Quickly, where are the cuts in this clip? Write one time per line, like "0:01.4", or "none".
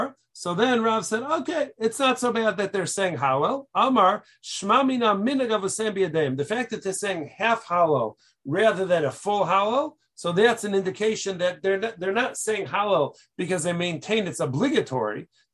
none